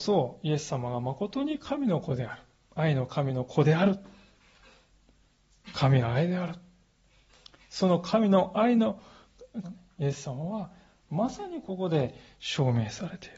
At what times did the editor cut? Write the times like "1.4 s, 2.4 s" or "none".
9.6 s

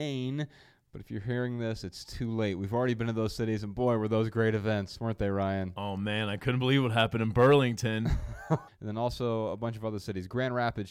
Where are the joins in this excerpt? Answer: 8.7 s

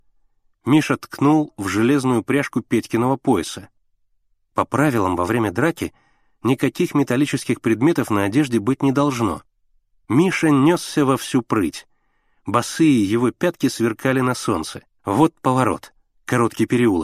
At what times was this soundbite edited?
10.0 s, 15.0 s

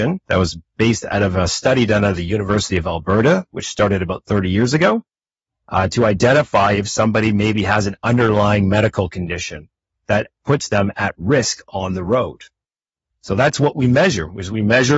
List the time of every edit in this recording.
none

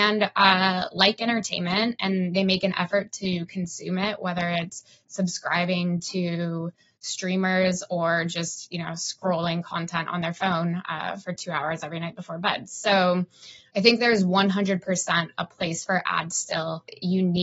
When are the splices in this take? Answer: none

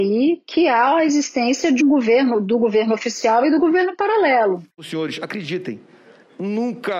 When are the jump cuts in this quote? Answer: 1.8 s, 4.7 s

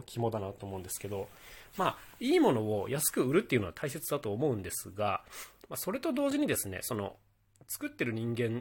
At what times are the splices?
none

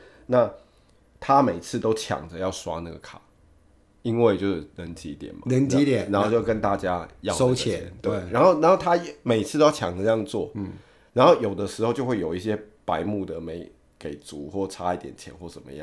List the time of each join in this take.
none

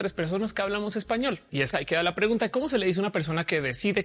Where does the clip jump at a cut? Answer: 1.7 s

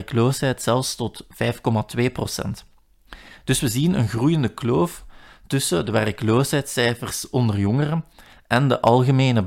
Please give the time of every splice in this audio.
none

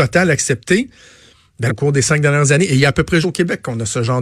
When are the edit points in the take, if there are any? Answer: 1.7 s, 3.2 s

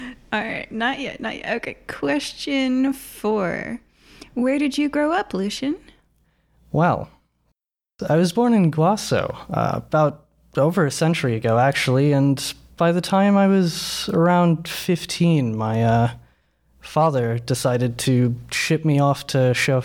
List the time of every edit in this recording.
none

